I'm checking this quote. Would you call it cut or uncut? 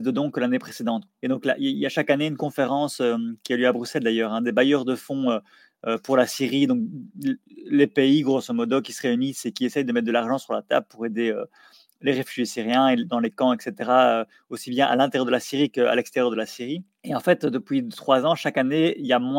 cut